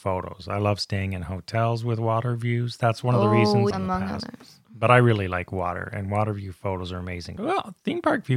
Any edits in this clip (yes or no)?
yes